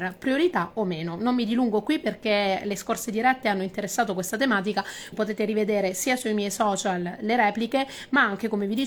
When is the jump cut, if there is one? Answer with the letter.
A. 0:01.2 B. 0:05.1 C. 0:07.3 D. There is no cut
B